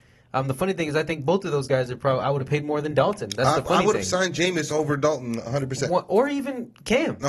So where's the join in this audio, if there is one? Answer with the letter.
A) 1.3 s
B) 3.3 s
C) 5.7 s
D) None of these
D